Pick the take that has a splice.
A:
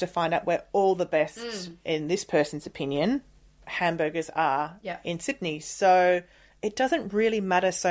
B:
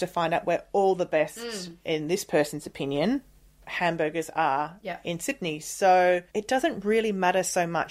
B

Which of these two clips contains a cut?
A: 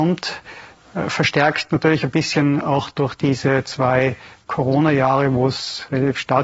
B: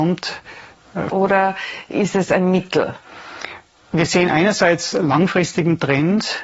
B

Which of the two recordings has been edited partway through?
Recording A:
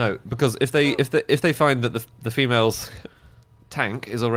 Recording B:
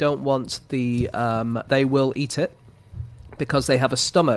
B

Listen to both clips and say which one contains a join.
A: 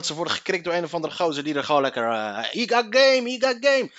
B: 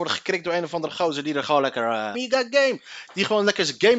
B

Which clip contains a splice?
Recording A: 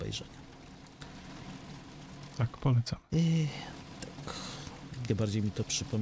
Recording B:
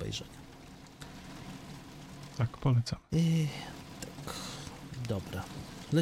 A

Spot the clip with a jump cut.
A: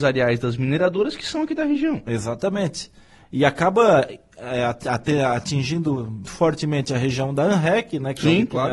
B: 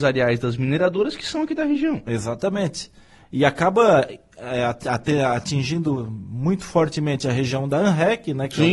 A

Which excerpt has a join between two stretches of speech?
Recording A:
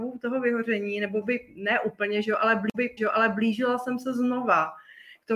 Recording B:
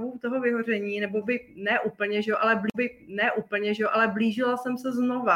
A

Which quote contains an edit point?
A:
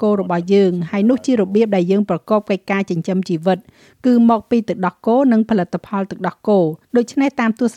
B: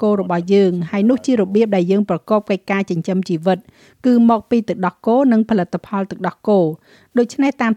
A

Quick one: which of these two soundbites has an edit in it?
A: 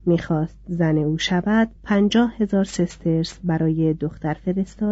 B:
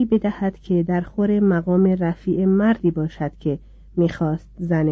A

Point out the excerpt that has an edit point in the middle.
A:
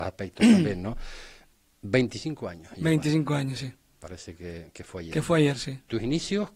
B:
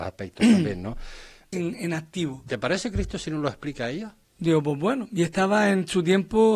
B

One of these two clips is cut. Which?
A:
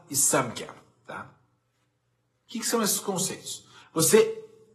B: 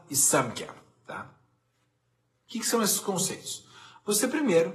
A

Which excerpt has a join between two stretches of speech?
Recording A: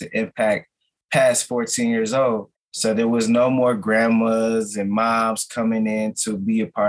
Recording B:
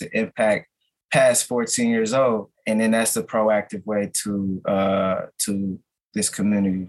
A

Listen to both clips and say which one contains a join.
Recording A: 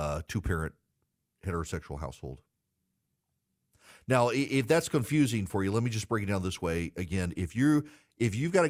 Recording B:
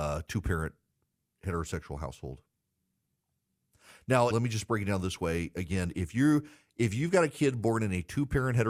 B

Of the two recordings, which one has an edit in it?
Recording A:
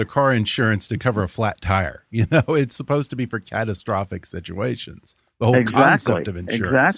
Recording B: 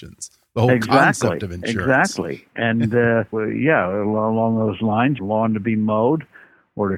B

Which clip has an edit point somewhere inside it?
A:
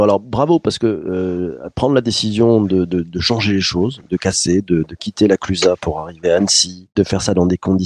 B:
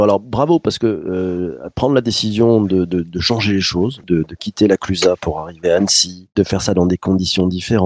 B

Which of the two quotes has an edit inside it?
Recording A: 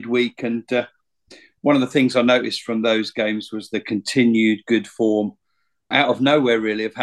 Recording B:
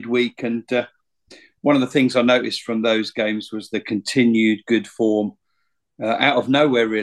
A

